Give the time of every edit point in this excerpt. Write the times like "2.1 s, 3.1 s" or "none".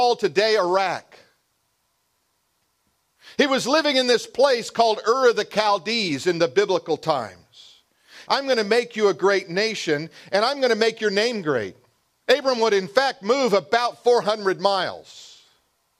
8.3 s, 12.2 s